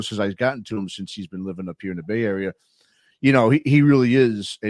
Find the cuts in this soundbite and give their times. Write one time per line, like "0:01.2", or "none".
none